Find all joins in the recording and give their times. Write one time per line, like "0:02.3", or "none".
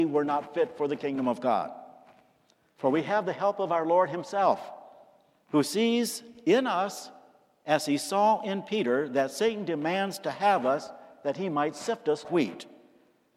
0:02.7
0:12.2

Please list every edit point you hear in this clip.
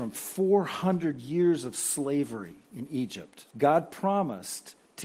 0:03.5

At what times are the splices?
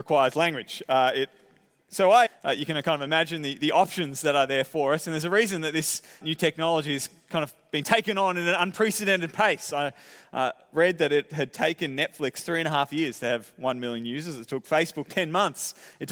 0:02.3
0:06.2

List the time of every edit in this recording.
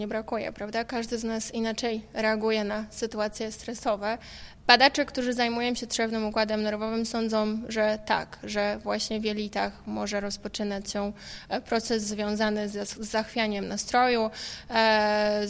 none

